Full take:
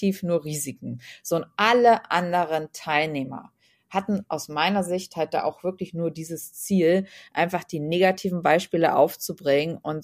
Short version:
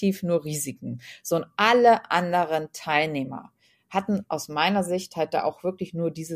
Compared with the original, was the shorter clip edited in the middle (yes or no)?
no